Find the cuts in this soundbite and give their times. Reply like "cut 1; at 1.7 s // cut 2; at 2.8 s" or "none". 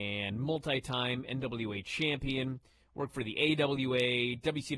none